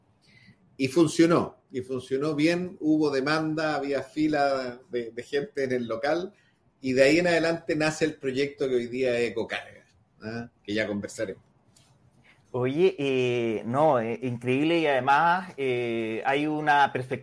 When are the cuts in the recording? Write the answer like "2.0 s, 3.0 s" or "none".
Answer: 10.5 s